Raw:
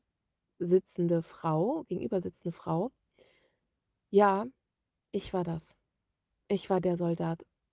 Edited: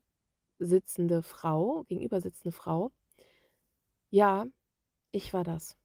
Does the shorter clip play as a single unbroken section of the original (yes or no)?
yes